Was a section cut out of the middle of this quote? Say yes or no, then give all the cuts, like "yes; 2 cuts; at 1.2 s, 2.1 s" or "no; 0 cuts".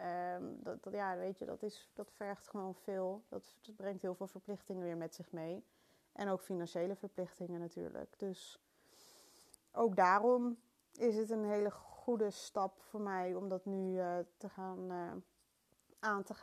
no; 0 cuts